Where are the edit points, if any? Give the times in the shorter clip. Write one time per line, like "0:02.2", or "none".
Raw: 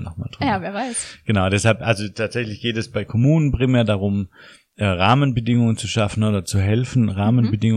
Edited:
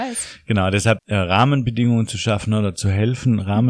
0:01.0